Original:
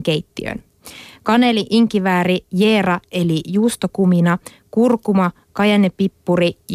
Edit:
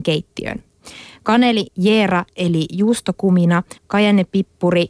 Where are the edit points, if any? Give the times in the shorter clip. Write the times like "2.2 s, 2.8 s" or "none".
1.7 s, 3.8 s